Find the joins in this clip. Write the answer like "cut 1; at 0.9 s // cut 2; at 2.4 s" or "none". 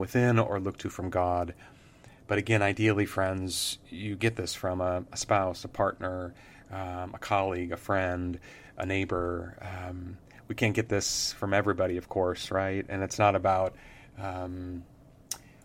none